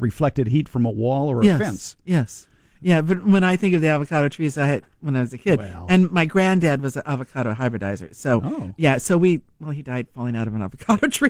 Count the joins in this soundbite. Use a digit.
0